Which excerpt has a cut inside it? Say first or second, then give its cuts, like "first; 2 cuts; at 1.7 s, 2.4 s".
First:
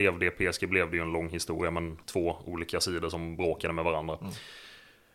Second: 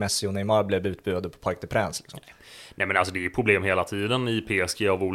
first; 1 cut; at 2.0 s